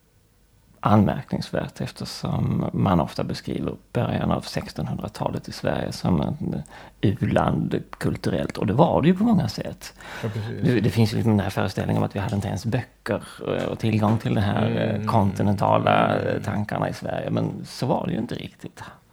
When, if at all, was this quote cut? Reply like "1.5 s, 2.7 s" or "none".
none